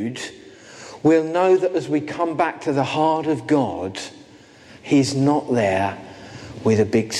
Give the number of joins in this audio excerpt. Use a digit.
0